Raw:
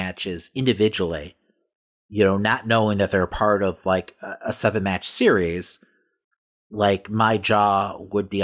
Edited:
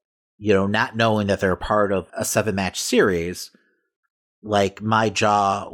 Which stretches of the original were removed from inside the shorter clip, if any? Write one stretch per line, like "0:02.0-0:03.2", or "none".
0:03.8-0:04.4